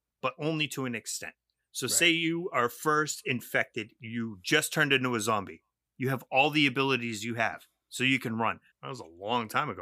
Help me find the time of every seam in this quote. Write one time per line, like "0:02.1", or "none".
0:05.9
0:08.7

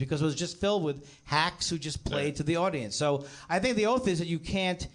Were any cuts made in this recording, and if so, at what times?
none

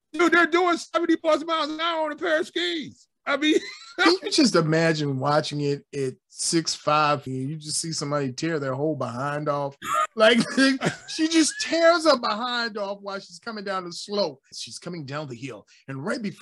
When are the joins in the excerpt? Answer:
0:07.3
0:14.5

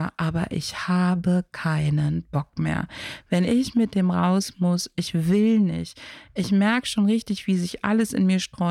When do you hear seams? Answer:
none

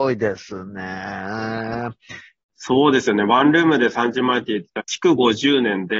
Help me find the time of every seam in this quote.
0:02.4
0:04.8

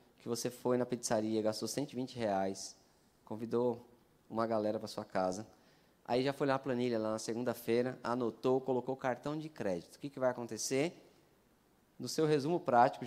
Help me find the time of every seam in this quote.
none

